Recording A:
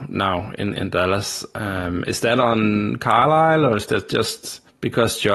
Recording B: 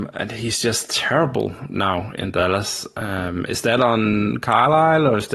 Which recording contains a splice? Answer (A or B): B